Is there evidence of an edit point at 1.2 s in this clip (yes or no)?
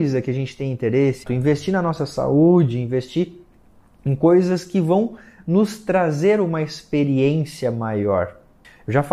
yes